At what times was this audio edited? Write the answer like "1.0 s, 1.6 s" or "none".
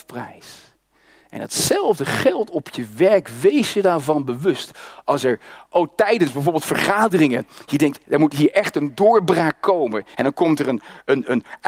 8.1 s, 10.1 s